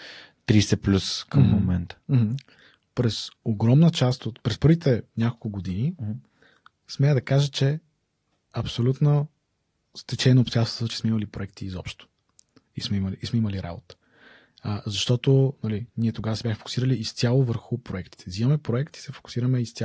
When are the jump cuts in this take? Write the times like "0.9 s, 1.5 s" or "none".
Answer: none